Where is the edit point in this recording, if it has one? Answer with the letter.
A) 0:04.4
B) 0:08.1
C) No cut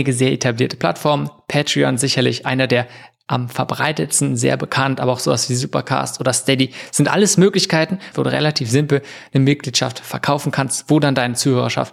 B